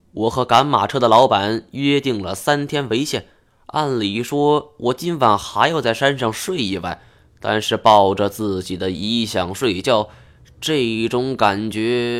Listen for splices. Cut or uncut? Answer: uncut